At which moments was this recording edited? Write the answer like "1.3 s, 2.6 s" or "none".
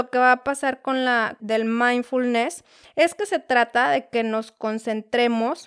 1.4 s